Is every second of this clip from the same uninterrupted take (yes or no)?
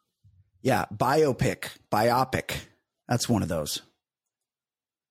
no